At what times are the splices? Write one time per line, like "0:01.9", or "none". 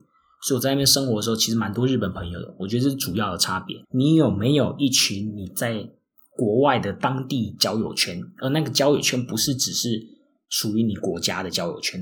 0:03.8